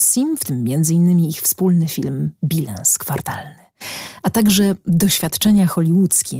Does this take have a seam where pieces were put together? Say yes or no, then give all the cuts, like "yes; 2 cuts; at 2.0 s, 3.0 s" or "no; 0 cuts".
no; 0 cuts